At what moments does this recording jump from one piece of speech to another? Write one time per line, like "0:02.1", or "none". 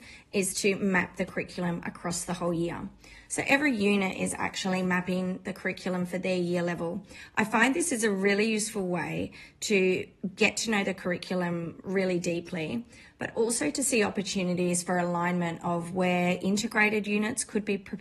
0:03.3